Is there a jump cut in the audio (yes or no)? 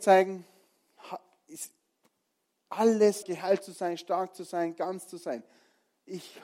yes